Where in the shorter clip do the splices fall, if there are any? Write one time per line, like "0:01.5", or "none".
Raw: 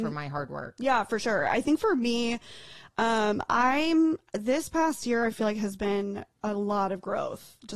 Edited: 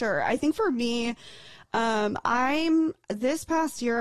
none